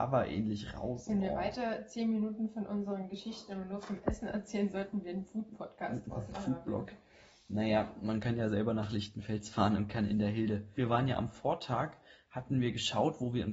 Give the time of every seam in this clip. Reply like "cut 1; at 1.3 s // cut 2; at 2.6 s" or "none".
cut 1; at 10.7 s